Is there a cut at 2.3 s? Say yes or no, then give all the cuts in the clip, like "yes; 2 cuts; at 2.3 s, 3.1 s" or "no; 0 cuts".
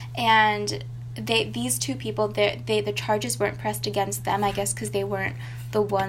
no; 0 cuts